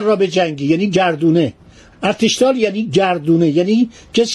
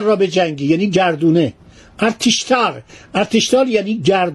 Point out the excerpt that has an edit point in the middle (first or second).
first